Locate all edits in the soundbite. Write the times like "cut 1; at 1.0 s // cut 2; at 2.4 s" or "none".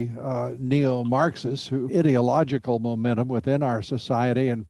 cut 1; at 1.9 s